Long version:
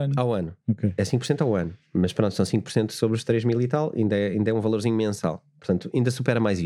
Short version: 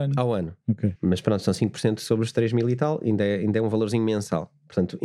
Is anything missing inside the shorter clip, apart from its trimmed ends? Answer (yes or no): yes